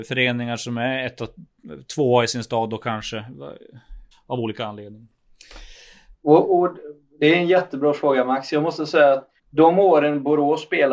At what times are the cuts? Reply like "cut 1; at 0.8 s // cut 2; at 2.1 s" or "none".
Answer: cut 1; at 4.1 s // cut 2; at 6.1 s // cut 3; at 9.4 s